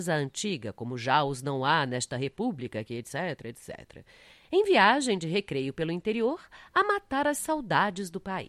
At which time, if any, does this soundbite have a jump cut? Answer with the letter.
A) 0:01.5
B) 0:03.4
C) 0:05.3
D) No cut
B